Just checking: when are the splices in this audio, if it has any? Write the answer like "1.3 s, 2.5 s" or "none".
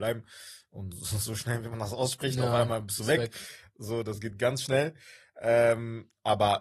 none